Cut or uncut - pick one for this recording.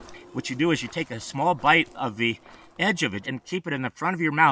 cut